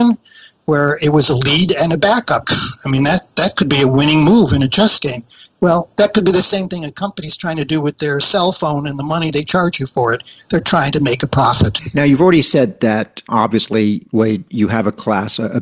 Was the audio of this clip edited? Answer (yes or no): yes